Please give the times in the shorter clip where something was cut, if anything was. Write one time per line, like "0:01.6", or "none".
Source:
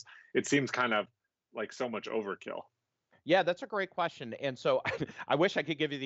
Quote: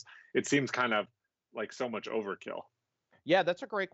none